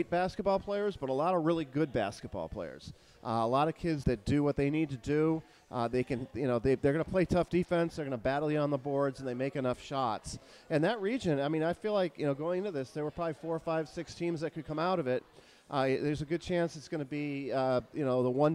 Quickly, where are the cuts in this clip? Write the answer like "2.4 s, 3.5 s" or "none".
4.0 s